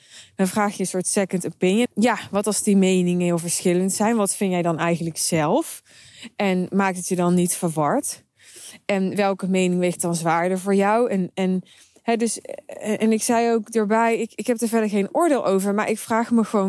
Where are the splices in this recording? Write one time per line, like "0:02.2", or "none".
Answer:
0:01.9